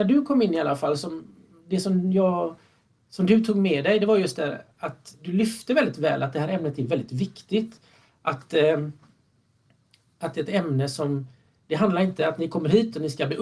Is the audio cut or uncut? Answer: uncut